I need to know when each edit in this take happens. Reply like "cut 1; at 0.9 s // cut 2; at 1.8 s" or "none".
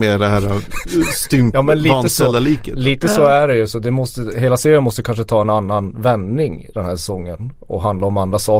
none